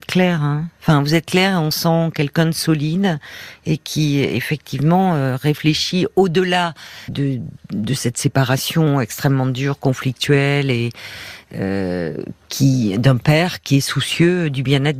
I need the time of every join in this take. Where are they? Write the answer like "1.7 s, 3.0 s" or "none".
7.1 s